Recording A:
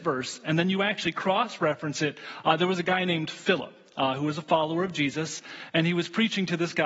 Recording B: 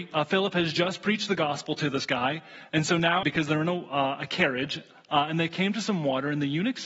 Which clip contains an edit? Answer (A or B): B